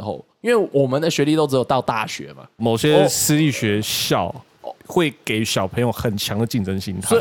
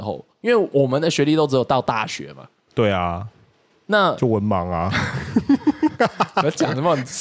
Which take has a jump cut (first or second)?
first